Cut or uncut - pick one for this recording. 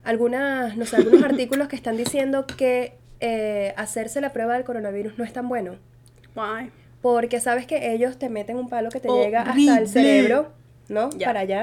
uncut